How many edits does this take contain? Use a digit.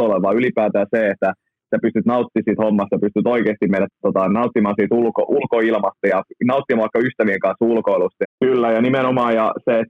1